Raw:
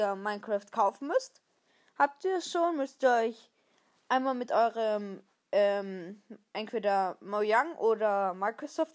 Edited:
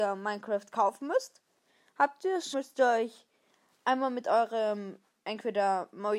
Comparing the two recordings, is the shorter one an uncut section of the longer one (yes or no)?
no